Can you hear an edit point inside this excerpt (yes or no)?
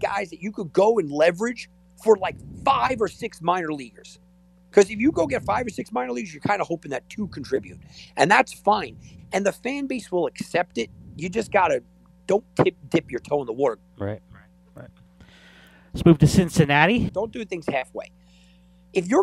yes